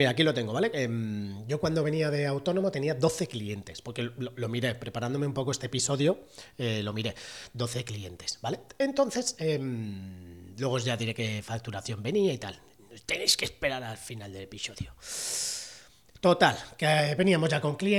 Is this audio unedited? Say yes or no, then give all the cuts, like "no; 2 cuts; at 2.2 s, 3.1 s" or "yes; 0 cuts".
yes; 0 cuts